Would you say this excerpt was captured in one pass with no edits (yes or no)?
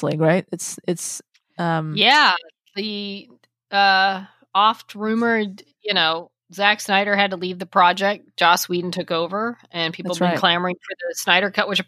yes